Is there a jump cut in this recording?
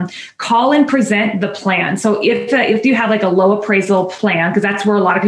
no; 0 cuts

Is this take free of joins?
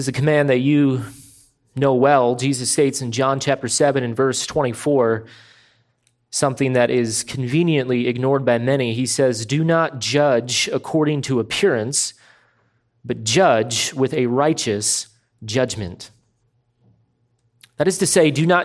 yes; 0 cuts

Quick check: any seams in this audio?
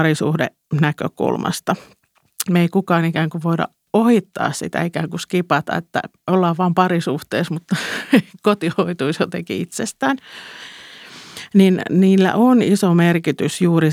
yes; 1 cut; at 2.5 s

